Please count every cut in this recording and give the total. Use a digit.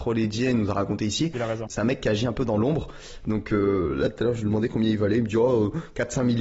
1